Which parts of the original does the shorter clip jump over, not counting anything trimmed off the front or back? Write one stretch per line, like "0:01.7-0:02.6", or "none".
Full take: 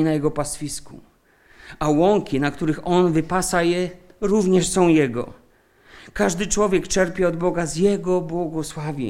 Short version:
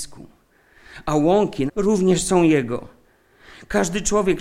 0:02.4-0:04.1